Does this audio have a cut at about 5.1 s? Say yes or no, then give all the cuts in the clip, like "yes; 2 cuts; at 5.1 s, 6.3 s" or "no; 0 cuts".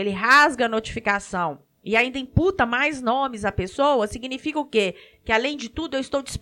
no; 0 cuts